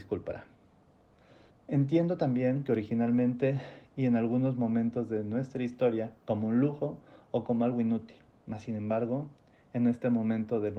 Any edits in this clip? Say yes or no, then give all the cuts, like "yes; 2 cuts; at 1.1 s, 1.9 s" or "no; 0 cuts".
yes; 2 cuts; at 1.5 s, 6.2 s